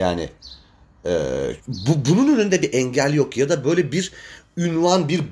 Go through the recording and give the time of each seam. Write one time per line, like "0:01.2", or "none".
0:01.6